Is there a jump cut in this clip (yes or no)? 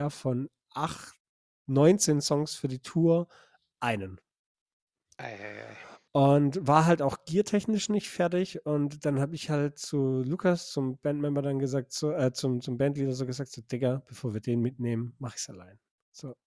no